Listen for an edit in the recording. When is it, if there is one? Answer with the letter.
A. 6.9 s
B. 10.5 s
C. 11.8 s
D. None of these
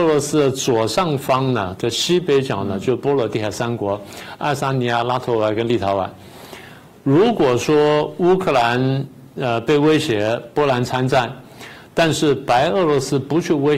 A